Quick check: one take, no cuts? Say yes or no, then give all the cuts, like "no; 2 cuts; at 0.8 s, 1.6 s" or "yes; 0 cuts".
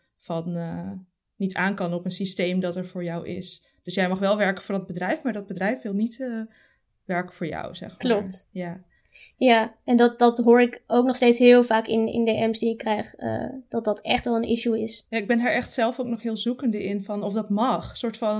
no; 1 cut; at 15.1 s